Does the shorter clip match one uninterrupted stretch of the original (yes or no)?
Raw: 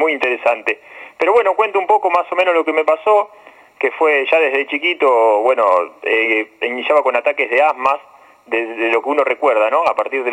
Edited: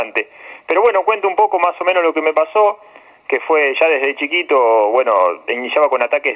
no